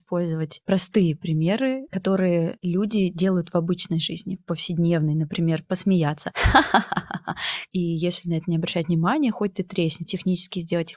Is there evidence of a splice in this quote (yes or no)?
yes